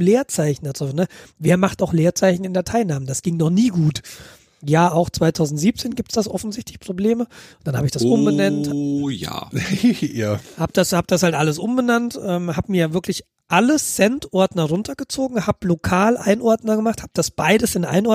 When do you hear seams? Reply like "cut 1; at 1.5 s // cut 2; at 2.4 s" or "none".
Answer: none